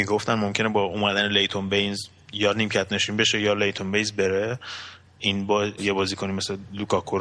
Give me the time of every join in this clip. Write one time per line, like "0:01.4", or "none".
0:05.8